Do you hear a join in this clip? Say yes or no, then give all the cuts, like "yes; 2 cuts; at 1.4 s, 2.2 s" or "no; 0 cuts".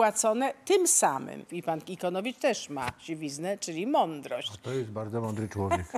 yes; 1 cut; at 1.5 s